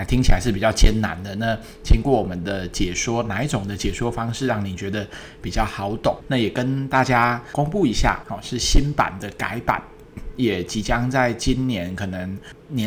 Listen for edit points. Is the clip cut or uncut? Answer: cut